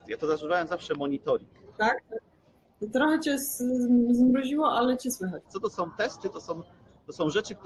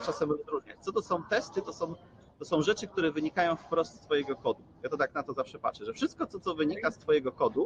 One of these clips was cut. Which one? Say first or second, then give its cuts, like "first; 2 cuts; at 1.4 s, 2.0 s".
first; 2 cuts; at 1.8 s, 5.4 s